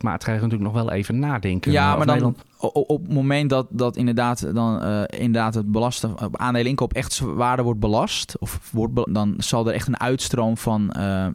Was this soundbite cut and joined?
yes; 1 cut; at 9.1 s

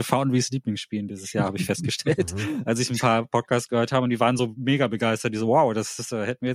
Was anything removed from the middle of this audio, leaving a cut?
no; 0 cuts

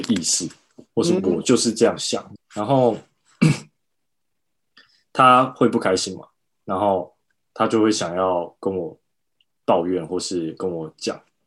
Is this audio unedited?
no; 1 cut; at 2.4 s

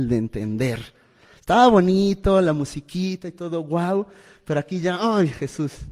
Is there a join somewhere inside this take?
no; 0 cuts

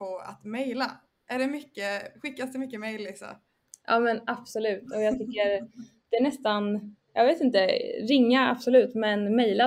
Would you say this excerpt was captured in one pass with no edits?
yes; 0 cuts

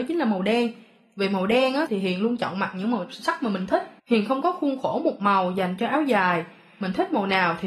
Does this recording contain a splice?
yes; 2 cuts; at 1.9 s, 4.0 s

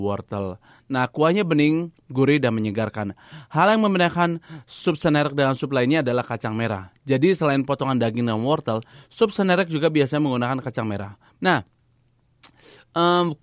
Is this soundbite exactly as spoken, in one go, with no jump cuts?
no; 1 cut; at 11.4 s

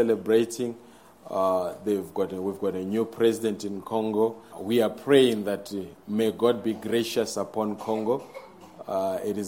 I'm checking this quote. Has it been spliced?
yes; 1 cut; at 4.5 s

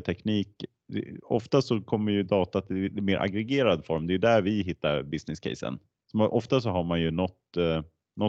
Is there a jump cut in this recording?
no; 0 cuts

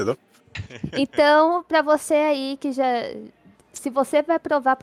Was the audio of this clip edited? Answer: no; 0 cuts

